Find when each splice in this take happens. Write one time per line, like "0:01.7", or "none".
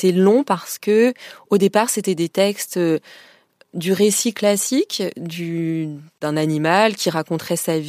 none